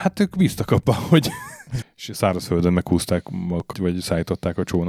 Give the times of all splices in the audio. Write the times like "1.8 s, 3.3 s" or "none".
1.8 s, 3.7 s